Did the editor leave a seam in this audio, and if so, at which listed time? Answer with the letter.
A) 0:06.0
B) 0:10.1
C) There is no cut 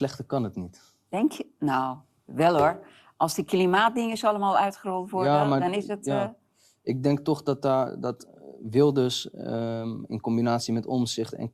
B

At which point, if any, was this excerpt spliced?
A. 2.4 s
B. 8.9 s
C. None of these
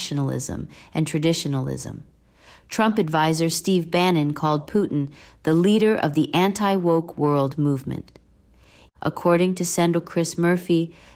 B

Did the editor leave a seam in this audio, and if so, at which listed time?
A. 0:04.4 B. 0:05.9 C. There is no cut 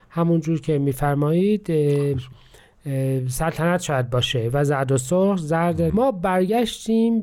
B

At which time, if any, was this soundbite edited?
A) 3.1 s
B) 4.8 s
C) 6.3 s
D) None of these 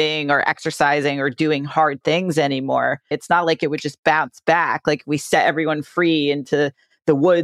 A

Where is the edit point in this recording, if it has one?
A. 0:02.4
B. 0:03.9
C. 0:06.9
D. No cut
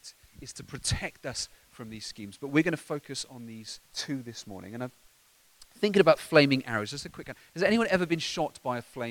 B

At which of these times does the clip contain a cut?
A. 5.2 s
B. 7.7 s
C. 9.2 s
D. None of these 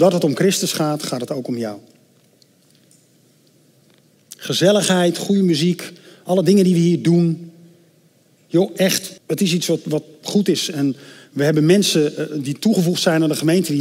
C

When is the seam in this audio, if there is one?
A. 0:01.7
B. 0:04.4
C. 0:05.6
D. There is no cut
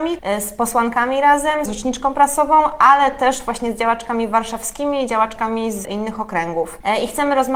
A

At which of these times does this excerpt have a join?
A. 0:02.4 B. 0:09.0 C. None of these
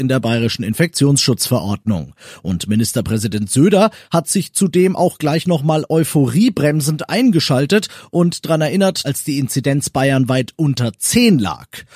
B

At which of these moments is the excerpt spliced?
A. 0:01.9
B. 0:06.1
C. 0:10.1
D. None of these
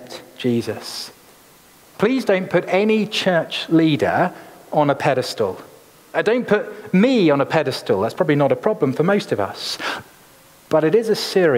A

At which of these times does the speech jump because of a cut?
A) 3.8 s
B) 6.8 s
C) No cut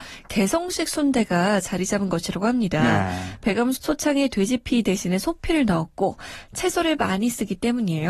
A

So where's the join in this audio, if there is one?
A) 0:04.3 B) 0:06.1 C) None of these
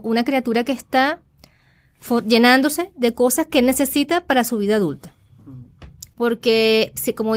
B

